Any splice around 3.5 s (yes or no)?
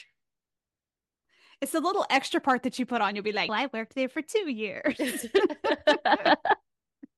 yes